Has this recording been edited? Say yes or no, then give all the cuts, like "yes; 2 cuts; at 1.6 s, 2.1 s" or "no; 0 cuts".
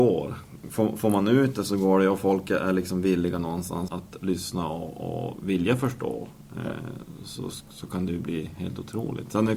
yes; 1 cut; at 3.9 s